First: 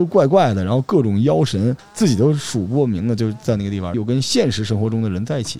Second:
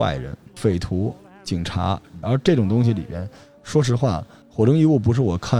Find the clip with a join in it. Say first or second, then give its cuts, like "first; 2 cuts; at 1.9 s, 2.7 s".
second; 1 cut; at 2.2 s